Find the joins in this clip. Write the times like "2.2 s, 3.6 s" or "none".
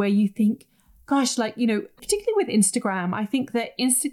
2.0 s